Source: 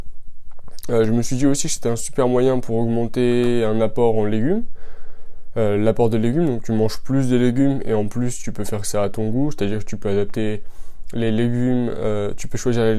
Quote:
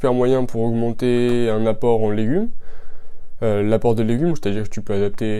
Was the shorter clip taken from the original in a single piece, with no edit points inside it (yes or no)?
no